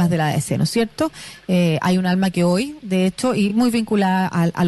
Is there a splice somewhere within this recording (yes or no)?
no